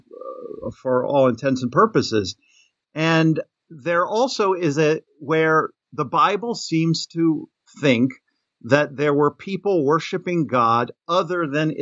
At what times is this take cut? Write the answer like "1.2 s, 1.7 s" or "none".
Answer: 5.1 s